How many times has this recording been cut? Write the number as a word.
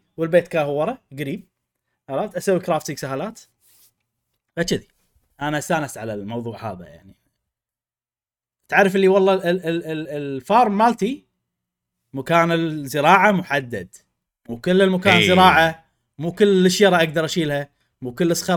zero